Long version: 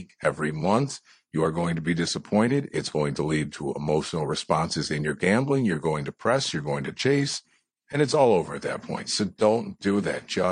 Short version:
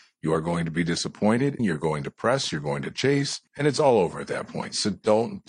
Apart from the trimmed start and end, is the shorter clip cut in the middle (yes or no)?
yes